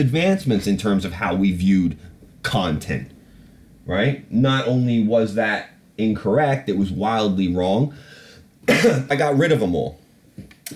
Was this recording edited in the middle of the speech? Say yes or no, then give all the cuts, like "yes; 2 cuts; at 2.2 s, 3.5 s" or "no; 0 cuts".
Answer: yes; 1 cut; at 9.1 s